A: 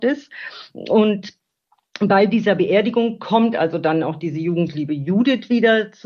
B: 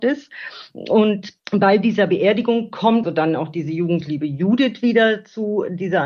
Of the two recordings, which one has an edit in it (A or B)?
B